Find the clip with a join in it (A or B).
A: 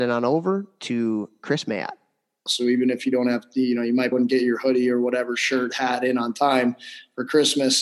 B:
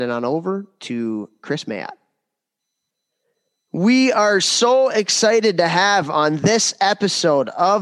A